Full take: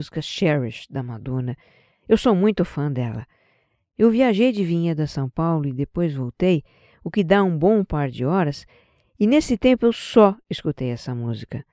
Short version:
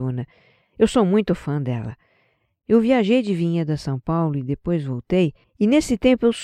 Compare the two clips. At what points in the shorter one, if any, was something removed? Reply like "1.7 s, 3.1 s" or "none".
5.4 s

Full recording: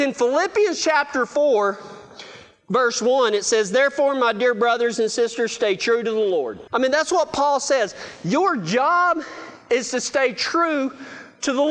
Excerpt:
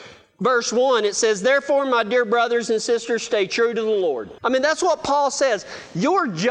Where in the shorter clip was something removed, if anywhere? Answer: none

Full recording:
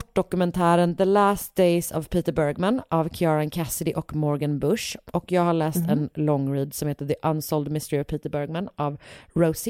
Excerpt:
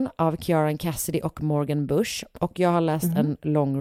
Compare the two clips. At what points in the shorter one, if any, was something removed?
none

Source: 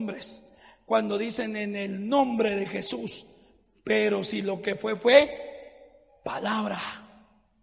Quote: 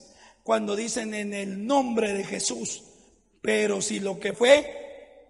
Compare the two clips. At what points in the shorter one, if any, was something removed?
4.3 s

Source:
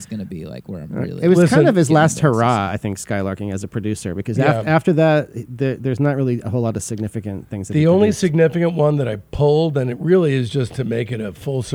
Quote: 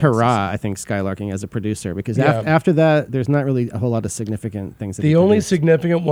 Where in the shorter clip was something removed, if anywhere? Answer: 3.1 s

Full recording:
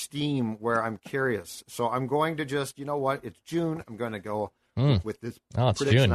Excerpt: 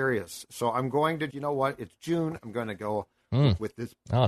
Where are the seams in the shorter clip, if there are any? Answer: 1.3 s

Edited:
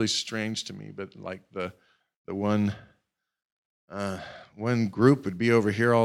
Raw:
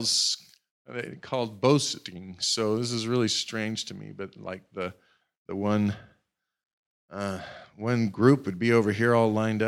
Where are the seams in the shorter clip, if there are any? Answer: none

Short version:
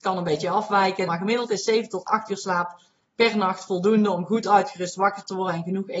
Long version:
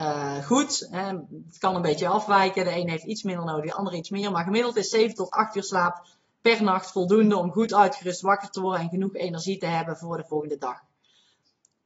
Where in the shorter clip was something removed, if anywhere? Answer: 1.1 s

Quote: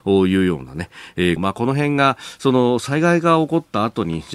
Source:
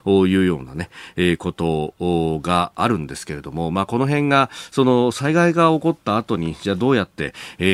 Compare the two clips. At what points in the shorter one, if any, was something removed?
1.4 s

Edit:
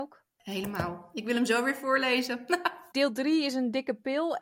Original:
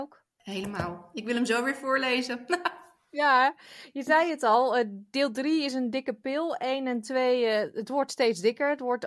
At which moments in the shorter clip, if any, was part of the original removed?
2.9 s

